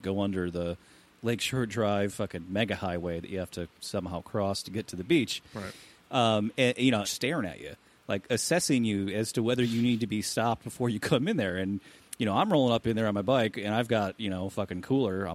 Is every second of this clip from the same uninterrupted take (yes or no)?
no